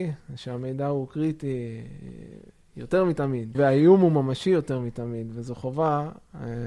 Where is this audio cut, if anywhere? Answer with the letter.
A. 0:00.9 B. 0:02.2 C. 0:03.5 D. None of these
C